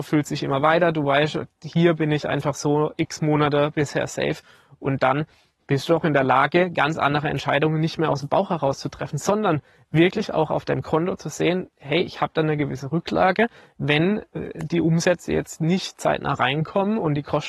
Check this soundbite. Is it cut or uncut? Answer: uncut